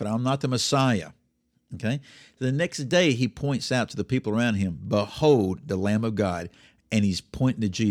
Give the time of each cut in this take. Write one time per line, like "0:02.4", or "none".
none